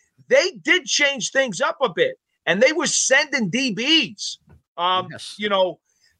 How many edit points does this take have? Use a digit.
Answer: 1